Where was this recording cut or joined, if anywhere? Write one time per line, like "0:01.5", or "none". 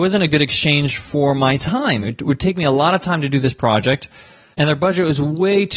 none

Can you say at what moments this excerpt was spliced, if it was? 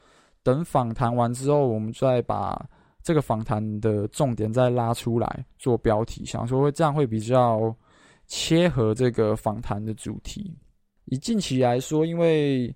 0:11.0

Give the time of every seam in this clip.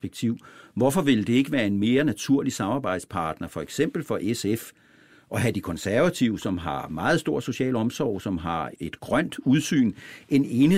0:08.7

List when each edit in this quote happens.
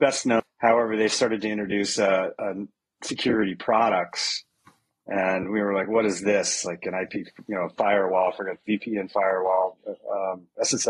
none

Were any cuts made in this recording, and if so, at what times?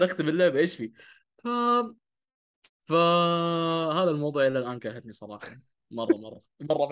0:02.7

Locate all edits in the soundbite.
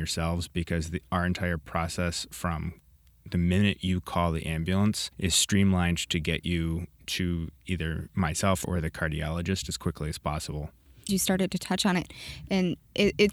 0:05.1
0:08.6
0:11.1

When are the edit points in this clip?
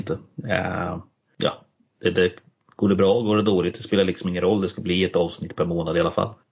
none

